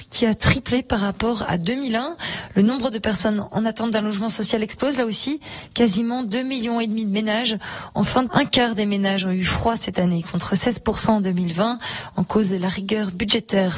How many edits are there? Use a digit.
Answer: 1